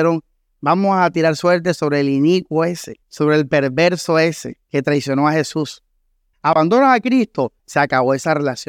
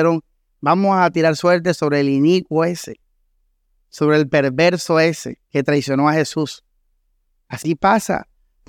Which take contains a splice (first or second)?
first